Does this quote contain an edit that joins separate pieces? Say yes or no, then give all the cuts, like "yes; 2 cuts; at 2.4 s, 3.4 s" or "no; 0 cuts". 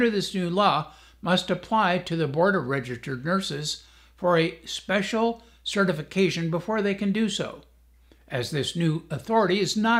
no; 0 cuts